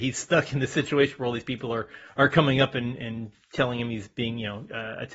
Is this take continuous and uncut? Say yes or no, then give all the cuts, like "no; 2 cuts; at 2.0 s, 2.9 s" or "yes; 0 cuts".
yes; 0 cuts